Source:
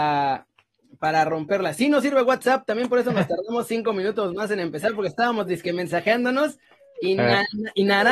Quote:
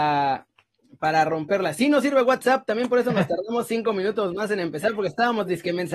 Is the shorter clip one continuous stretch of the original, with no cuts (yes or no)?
yes